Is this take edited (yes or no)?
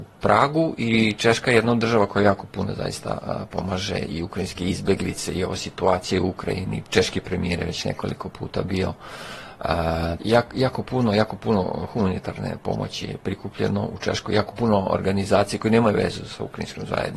yes